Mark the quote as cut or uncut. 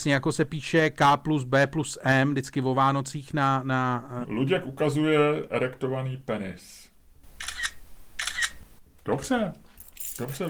cut